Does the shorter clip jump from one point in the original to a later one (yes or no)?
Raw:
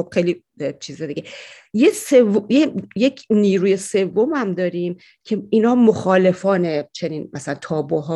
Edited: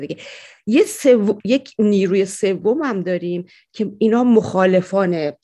yes